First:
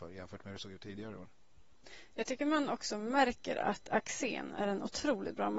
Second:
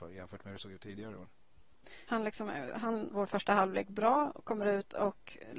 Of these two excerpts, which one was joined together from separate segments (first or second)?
second